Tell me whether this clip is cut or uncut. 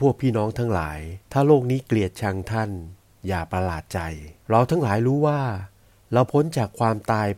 cut